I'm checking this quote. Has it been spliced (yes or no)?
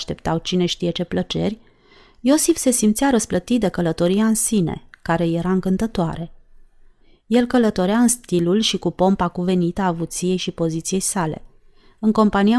no